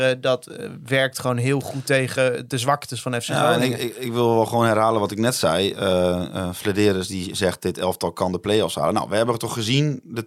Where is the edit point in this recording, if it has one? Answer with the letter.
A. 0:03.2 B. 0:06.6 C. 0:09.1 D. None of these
D